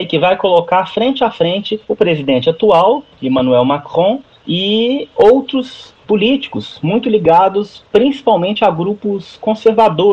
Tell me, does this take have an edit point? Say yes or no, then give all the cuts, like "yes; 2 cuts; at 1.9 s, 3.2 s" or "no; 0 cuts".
no; 0 cuts